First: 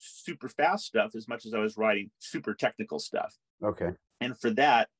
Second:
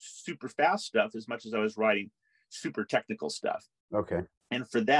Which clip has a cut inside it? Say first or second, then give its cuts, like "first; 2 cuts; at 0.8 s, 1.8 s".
first; 1 cut; at 2.1 s